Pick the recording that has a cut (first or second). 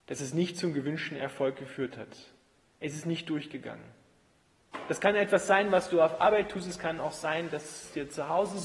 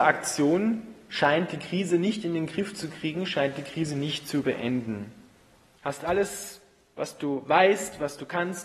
second